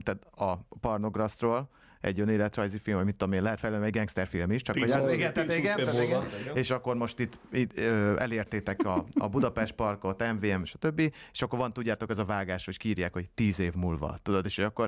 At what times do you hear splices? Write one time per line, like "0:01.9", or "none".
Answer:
none